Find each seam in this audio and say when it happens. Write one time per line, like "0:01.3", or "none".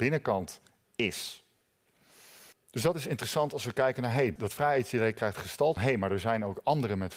0:02.5
0:04.4
0:05.8